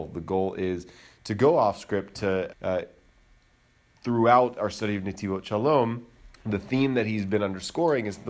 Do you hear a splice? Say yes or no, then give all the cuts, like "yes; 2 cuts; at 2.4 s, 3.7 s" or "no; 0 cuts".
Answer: yes; 2 cuts; at 2.5 s, 6.3 s